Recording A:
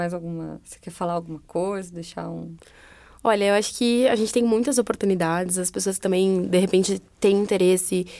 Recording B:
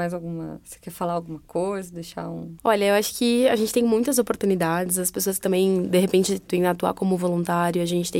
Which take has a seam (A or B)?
B